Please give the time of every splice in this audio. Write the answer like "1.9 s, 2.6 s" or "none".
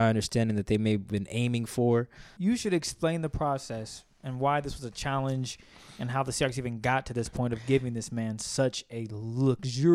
2.4 s